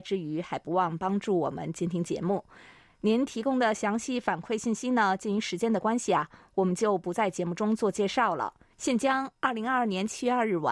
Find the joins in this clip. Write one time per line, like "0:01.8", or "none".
0:08.7